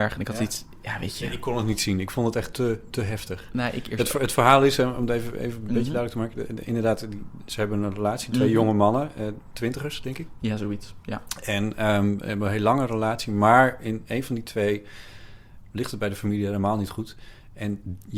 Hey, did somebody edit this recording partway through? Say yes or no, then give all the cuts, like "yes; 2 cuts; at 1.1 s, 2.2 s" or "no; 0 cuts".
no; 0 cuts